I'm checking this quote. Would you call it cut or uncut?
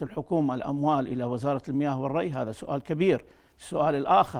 uncut